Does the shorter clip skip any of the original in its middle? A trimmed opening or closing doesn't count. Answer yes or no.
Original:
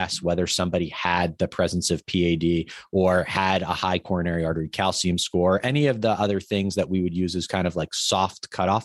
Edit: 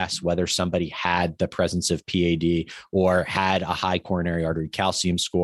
no